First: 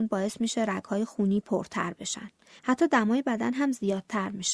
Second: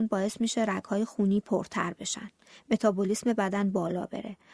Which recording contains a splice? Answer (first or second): first